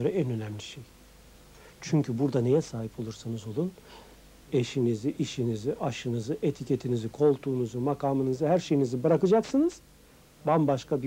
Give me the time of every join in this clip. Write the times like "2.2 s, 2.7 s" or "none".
none